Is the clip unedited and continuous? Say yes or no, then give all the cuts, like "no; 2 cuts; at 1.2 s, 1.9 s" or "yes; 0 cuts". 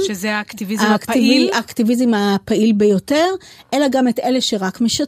yes; 0 cuts